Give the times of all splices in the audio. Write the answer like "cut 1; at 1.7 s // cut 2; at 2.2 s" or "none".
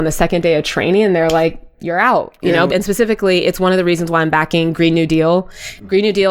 cut 1; at 2.7 s